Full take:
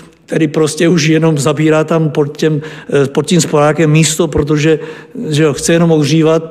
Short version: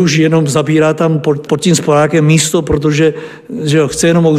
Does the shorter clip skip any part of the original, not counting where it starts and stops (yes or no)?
yes